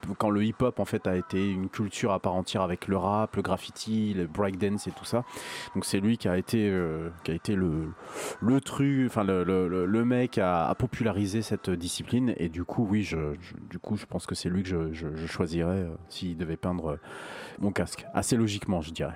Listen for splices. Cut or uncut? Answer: cut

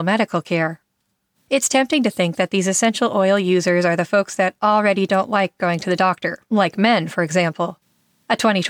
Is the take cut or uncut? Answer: cut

